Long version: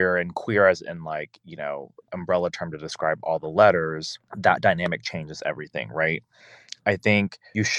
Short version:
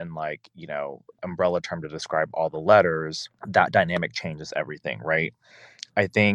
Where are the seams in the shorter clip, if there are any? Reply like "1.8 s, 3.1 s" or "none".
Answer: none